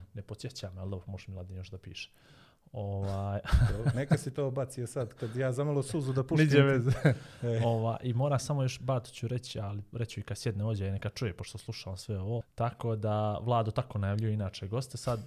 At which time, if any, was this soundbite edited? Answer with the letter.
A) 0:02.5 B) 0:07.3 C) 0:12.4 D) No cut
C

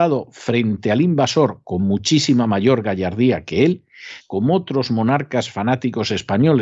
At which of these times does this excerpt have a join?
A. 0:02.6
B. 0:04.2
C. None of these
B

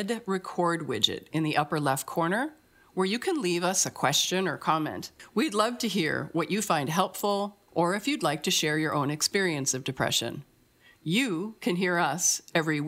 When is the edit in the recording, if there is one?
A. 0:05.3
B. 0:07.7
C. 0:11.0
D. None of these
B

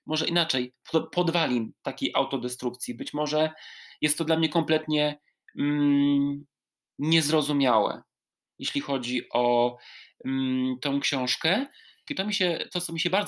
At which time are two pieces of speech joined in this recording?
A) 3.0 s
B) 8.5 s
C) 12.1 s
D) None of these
C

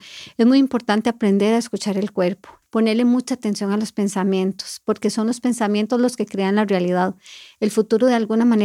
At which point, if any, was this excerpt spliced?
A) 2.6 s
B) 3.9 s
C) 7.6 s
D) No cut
A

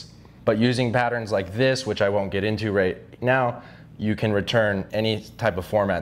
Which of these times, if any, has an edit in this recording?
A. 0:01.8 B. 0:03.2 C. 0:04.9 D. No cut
C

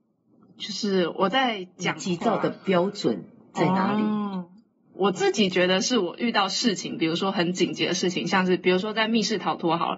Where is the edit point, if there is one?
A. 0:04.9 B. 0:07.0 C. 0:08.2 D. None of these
A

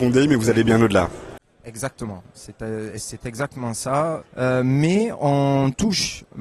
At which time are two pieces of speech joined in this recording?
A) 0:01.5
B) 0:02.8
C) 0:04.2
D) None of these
C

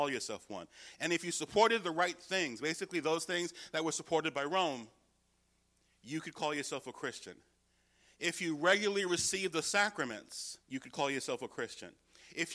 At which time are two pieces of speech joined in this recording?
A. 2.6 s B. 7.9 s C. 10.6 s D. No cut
C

